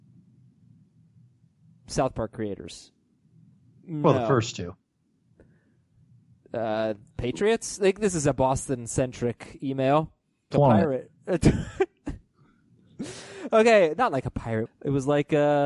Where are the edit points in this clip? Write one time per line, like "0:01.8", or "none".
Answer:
0:10.5
0:14.7